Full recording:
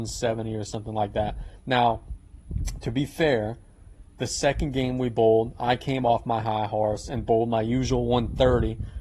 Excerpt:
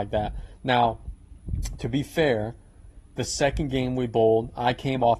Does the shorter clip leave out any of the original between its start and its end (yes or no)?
no